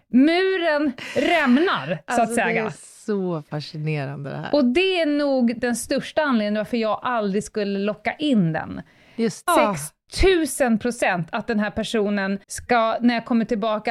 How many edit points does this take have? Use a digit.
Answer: 2